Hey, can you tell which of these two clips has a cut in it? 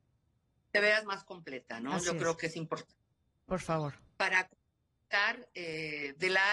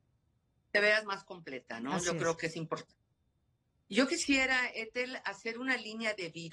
first; 1 cut; at 3.5 s

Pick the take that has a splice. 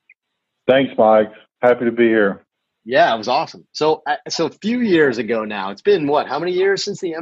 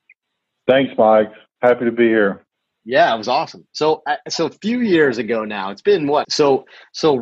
second; 1 cut; at 6.2 s

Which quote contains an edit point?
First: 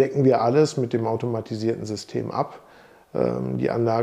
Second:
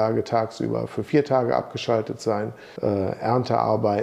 second; 1 cut; at 2.8 s

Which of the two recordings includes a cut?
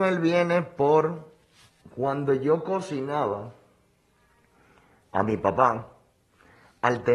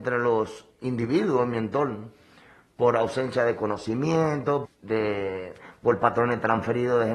second; 1 cut; at 4.6 s

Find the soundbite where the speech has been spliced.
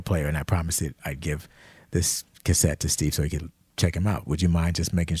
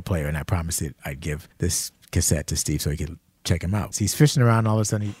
second; 2 cuts; at 1.5 s, 3.9 s

